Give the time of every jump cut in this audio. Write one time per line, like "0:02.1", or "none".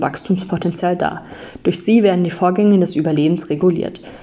none